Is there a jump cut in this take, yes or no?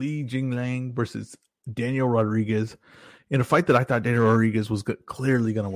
no